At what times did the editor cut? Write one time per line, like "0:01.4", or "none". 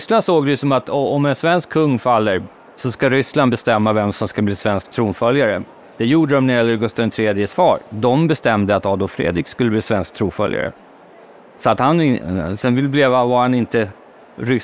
none